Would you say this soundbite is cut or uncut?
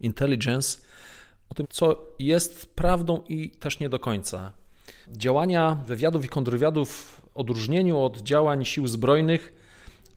cut